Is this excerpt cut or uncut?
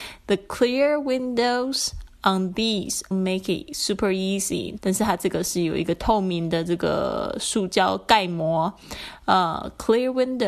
cut